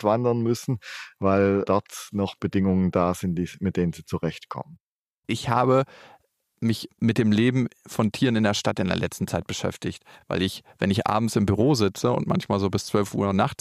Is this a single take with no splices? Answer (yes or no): yes